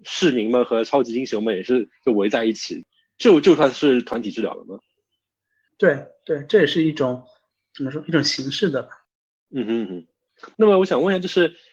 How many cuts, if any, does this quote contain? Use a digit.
1